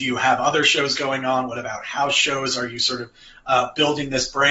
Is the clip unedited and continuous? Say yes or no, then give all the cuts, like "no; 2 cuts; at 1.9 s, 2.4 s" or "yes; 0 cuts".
yes; 0 cuts